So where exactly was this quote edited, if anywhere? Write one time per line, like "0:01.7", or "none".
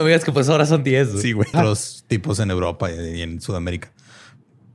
0:01.5